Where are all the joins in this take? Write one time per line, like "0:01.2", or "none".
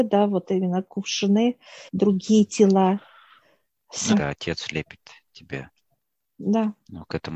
0:01.9
0:04.1